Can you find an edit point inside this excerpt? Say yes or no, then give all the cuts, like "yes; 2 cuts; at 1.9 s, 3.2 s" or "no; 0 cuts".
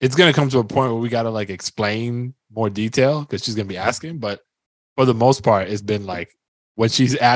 no; 0 cuts